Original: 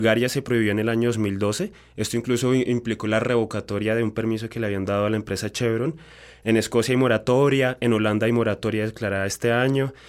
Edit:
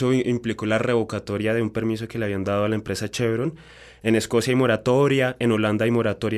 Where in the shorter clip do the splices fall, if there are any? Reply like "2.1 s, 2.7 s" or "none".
none